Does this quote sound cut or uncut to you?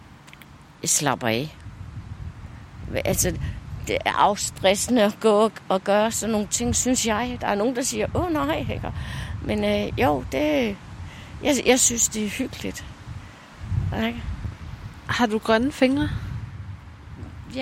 uncut